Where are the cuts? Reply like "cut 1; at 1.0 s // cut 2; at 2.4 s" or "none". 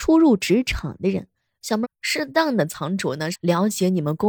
cut 1; at 1.8 s // cut 2; at 3.3 s